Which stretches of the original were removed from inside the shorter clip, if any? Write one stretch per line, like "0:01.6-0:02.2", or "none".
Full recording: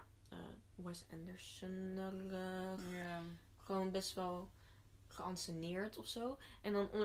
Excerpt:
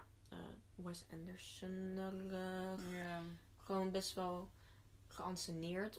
none